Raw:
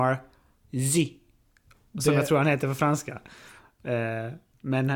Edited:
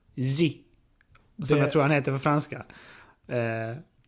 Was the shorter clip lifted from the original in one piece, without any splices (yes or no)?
yes